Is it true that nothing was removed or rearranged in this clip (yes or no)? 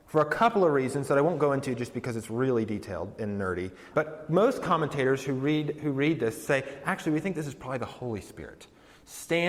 no